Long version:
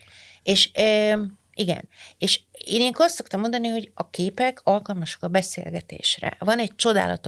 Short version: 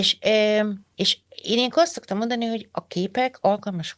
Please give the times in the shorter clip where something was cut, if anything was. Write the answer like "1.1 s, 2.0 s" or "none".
0.9 s